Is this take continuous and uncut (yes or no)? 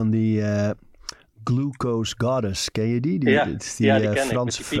yes